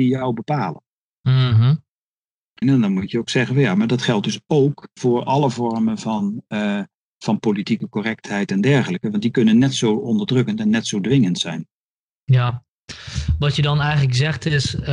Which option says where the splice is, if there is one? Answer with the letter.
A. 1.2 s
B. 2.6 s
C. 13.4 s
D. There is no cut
B